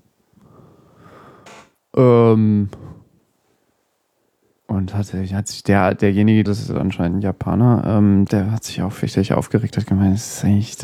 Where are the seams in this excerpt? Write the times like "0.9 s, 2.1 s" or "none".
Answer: 6.5 s, 8.3 s